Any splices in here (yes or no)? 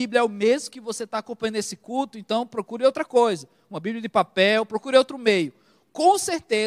no